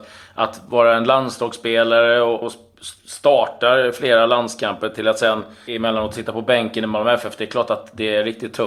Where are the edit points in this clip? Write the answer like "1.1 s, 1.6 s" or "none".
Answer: 2.4 s, 5.7 s